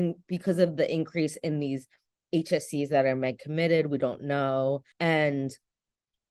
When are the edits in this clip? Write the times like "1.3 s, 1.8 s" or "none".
4.9 s